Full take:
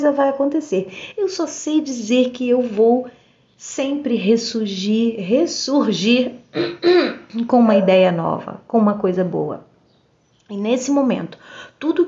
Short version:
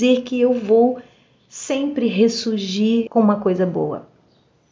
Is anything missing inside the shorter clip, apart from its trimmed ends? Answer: yes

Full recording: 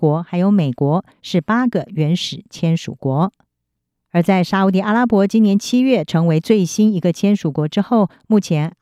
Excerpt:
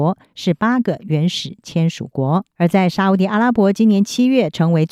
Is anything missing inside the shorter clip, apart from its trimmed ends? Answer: yes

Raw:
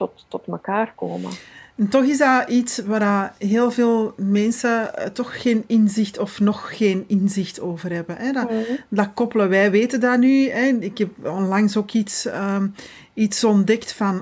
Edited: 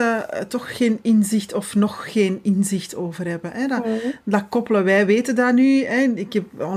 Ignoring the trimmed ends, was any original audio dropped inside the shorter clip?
no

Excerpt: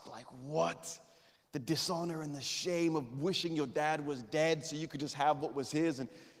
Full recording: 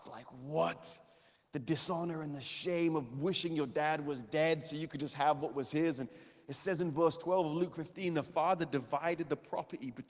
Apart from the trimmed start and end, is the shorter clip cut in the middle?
no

